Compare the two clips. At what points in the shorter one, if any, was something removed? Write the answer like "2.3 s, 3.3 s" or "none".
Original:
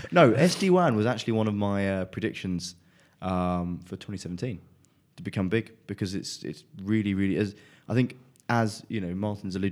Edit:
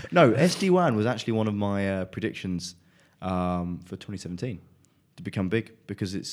none